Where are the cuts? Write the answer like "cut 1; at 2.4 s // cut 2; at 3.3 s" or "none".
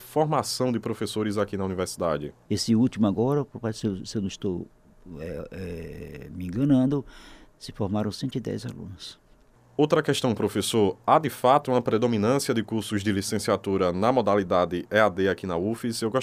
cut 1; at 2.5 s